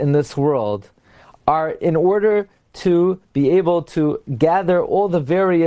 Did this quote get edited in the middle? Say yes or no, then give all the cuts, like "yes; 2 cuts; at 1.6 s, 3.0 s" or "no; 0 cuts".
no; 0 cuts